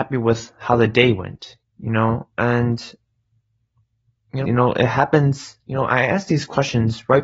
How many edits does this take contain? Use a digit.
2